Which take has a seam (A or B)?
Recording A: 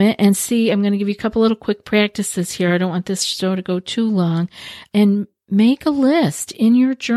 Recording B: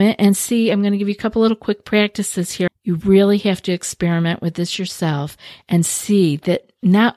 B